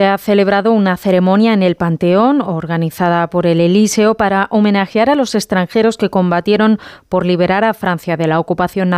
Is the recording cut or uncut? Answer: uncut